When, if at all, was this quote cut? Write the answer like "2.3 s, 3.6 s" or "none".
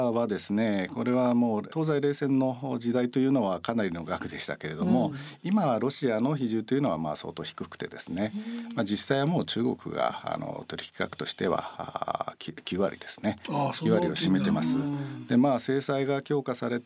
none

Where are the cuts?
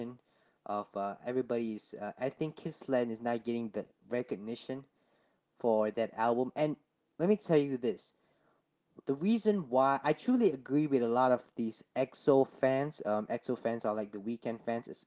none

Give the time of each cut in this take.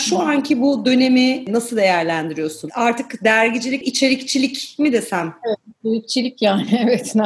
3.8 s

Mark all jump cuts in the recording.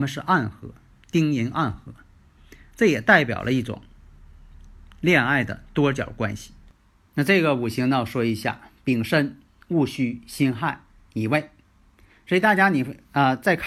none

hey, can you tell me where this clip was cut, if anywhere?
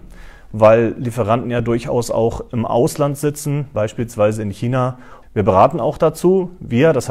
3.7 s, 5.2 s

